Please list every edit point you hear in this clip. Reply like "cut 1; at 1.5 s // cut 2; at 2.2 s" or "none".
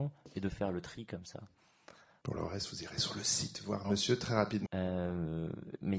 cut 1; at 2.2 s // cut 2; at 4.7 s